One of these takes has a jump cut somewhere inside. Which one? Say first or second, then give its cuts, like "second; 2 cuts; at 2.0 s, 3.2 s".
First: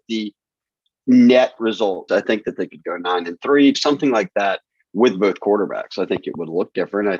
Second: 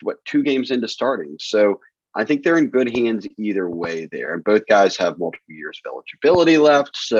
first; 2 cuts; at 2.1 s, 3.7 s